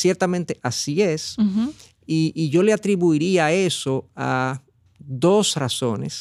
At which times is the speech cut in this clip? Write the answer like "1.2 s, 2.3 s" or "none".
none